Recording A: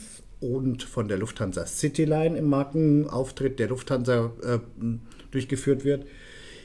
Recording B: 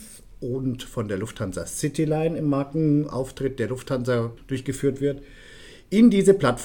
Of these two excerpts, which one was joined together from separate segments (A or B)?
B